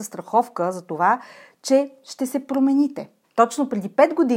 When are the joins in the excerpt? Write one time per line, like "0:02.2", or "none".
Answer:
0:03.2